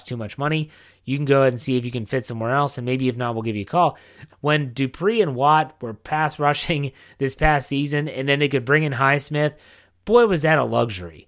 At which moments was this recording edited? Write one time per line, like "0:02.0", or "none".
0:04.3